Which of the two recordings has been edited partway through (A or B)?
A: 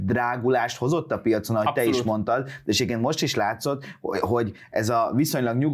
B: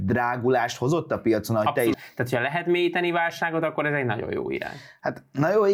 B